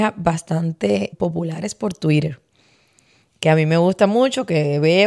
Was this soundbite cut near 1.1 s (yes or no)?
yes